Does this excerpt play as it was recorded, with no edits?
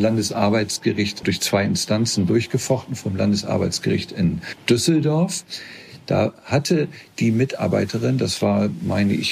no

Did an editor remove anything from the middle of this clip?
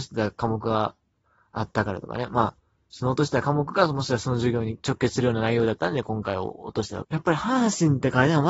yes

